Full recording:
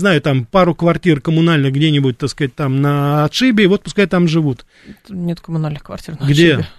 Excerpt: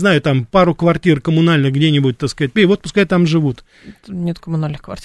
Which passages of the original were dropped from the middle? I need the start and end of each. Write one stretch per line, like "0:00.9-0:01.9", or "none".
0:02.6-0:03.6